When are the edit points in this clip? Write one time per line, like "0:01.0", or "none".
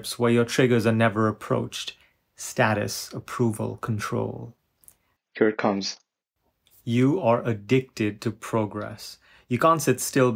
0:05.2